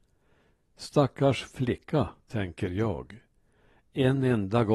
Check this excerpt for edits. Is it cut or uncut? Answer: uncut